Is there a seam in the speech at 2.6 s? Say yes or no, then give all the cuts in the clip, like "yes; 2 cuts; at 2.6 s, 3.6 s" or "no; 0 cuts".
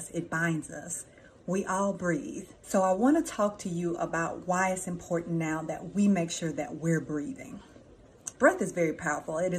yes; 2 cuts; at 2.6 s, 8.3 s